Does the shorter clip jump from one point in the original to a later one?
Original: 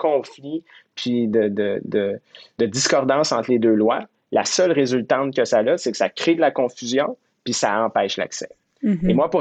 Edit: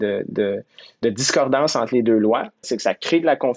yes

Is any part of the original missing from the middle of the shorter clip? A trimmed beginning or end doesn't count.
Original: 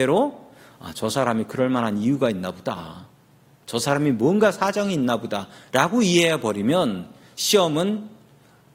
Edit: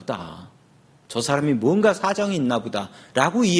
no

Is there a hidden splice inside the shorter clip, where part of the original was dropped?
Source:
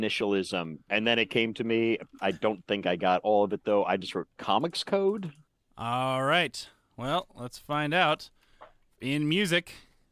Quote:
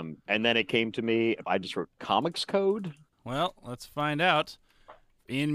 yes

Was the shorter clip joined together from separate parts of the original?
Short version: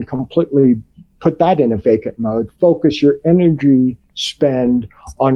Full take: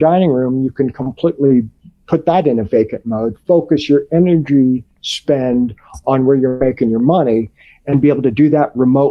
no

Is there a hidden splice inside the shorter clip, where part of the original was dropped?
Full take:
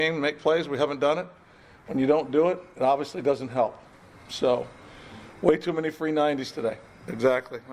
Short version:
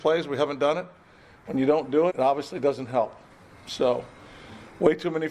yes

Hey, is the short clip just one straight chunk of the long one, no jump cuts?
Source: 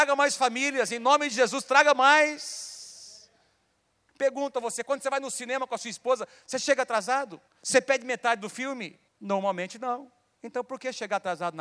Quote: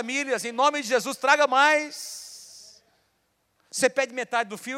no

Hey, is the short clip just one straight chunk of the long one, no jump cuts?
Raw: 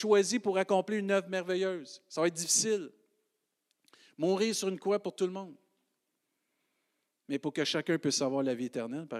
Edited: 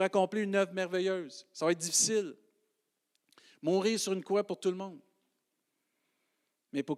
yes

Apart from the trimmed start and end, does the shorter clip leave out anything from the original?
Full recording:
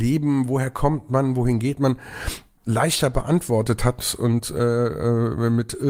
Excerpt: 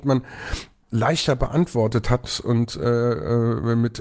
no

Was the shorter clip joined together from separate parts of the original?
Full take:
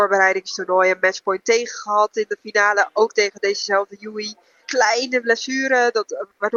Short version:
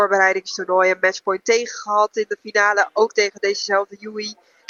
no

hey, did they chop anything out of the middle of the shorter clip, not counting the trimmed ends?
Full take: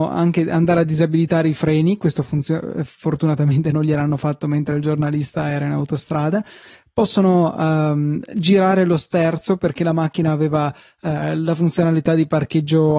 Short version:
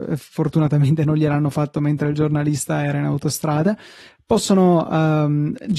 no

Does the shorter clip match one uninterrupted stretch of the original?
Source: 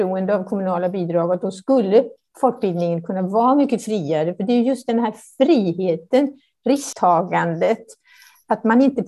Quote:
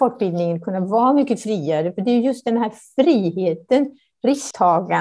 yes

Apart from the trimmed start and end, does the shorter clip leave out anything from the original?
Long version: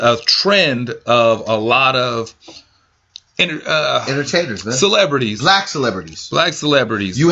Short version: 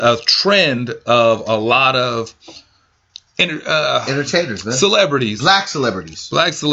no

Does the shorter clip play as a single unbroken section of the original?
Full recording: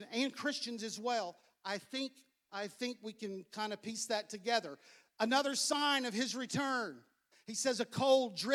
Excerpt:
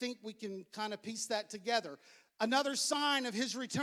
yes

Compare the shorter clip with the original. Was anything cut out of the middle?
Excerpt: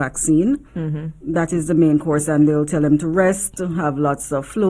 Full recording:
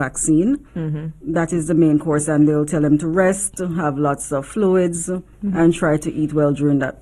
no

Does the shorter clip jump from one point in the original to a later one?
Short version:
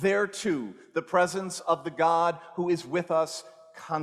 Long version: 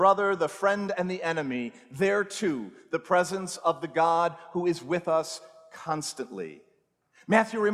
no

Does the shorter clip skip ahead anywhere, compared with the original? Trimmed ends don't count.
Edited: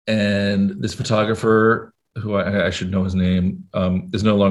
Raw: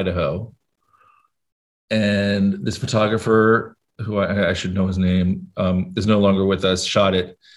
no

